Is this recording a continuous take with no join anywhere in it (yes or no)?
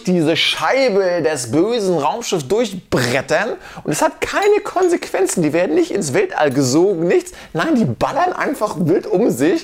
yes